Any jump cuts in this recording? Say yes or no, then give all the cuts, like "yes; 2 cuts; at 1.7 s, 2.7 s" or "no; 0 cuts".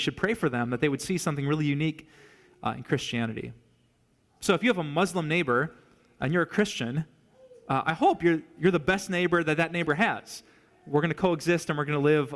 no; 0 cuts